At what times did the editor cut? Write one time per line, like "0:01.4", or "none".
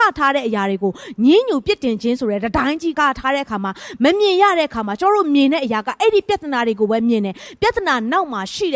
0:02.9